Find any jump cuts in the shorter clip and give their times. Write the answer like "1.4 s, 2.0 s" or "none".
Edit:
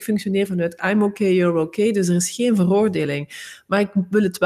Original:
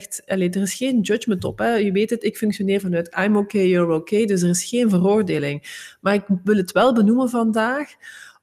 none